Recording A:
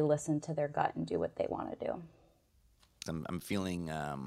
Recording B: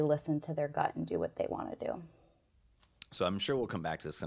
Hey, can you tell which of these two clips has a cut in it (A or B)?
A